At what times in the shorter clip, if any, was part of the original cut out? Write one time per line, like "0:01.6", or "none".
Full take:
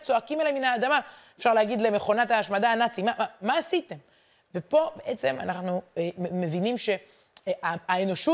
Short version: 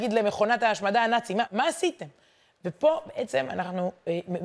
0:01.5